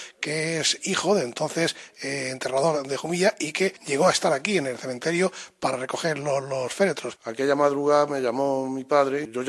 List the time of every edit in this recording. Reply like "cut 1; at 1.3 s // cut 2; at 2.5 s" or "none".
cut 1; at 7.2 s